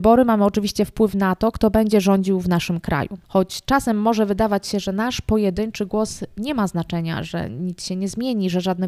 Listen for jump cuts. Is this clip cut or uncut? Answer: uncut